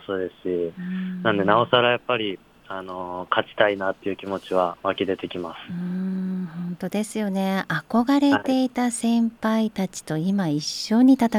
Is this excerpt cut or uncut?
uncut